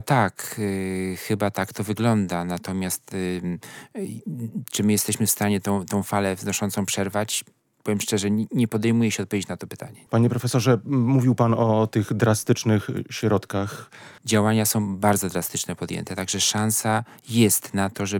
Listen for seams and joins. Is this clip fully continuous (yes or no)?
no